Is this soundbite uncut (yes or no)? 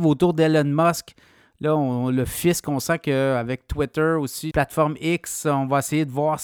no